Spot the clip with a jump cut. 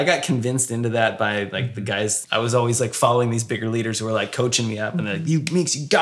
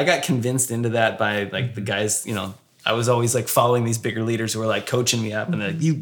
first; 1 cut; at 2.2 s

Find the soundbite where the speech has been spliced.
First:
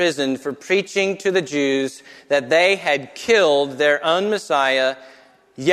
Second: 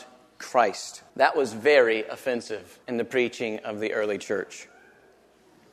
second; 2 cuts; at 1.1 s, 2.8 s

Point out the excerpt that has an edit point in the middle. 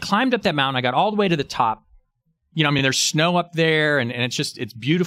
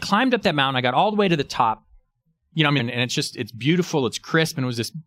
second; 1 cut; at 2.8 s

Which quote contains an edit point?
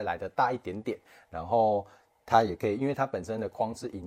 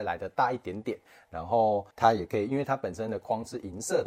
second; 1 cut; at 1.9 s

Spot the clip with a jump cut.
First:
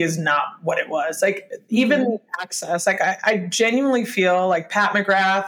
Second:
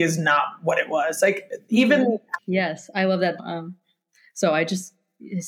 second; 2 cuts; at 2.4 s, 3.4 s

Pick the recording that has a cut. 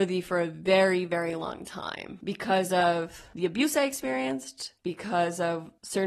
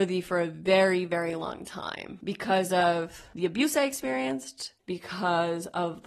second; 1 cut; at 4.8 s

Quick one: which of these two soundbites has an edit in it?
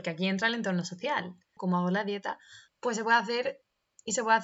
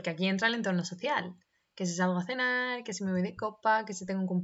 first; 2 cuts; at 1.6 s, 2.7 s

